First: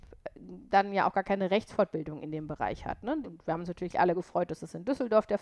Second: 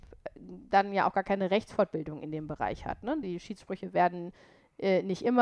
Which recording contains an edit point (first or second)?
first